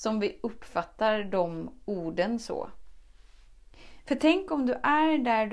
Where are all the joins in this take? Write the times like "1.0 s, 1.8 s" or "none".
none

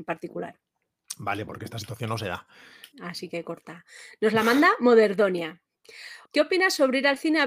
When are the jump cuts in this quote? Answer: 2.9 s, 6.3 s

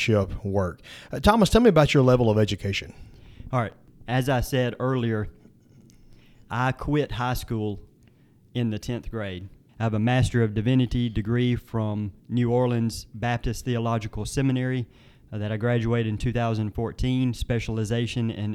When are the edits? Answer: 9.7 s

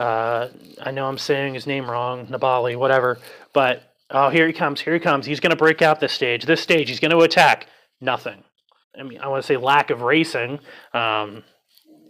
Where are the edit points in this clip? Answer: 8.8 s

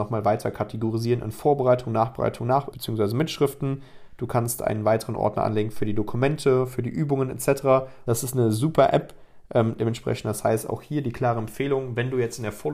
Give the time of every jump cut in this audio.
2.7 s, 8.1 s

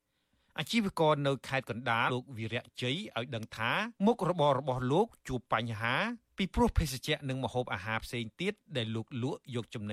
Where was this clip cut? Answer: 2.1 s, 4.0 s, 6.3 s

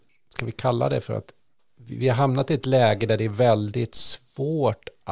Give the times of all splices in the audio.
none

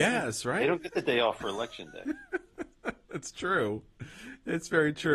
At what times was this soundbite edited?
none

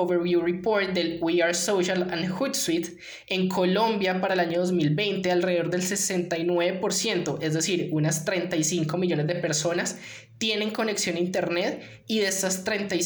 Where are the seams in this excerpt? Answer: none

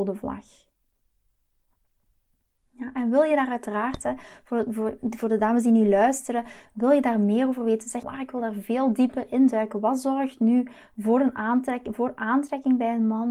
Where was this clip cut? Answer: 8.0 s

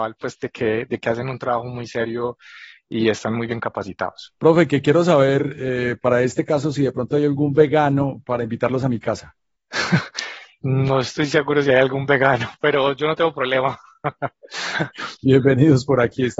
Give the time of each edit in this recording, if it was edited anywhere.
none

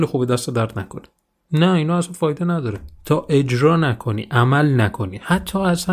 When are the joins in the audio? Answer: 3.0 s

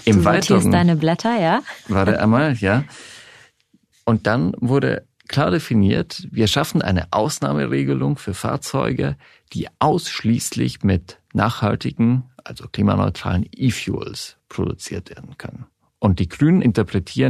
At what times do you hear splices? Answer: 3.9 s

